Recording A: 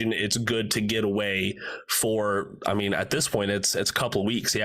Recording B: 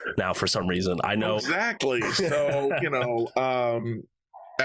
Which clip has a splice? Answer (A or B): B